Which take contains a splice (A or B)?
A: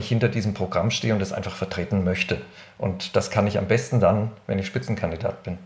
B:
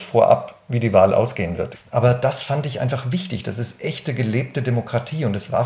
B